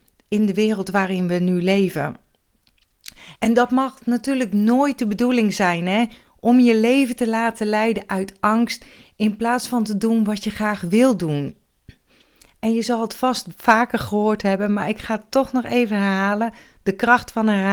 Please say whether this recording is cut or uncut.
cut